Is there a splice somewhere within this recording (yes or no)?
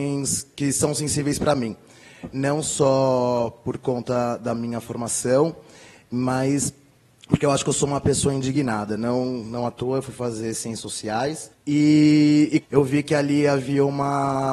yes